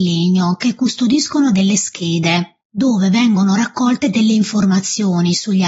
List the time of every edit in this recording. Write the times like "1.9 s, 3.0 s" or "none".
none